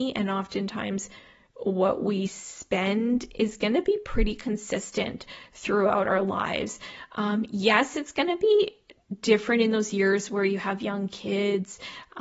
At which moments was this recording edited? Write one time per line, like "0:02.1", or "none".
none

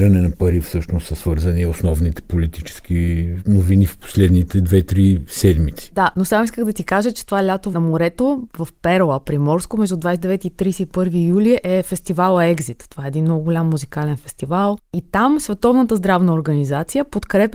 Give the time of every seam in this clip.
none

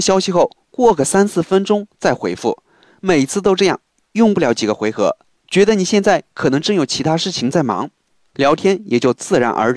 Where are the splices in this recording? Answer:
0:05.3

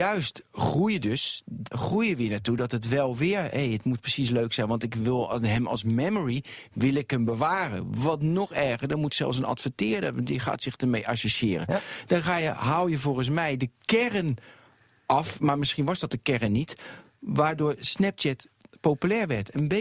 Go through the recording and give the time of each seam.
0:01.7

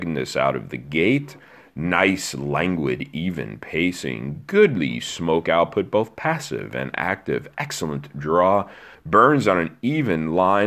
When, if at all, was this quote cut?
0:08.9

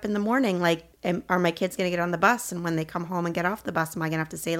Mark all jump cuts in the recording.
0:00.9

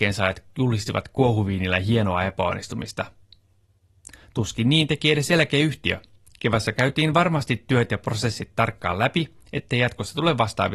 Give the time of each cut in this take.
none

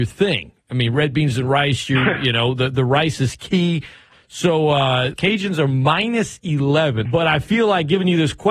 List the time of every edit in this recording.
0:04.1
0:05.1
0:07.0

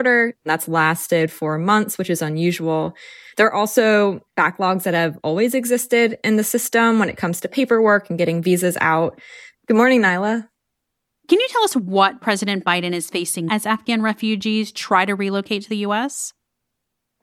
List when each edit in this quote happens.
0:09.5
0:13.5

